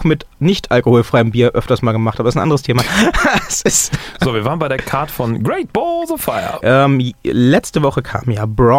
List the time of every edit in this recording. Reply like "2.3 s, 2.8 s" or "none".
6.6 s